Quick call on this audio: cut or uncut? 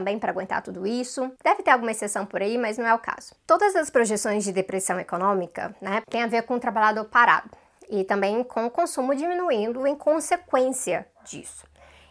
cut